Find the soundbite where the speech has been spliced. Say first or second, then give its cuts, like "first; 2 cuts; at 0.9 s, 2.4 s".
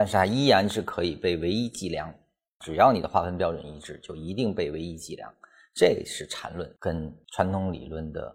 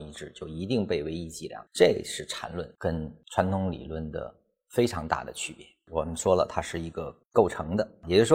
second; 1 cut; at 1.7 s